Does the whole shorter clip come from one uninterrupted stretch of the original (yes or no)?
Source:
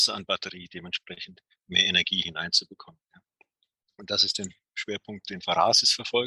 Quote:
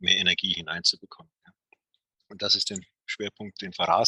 yes